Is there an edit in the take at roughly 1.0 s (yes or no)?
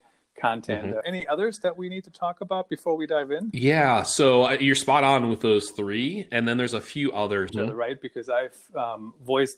yes